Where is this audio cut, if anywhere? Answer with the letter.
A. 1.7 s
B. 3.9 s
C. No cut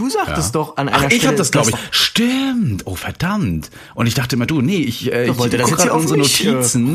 A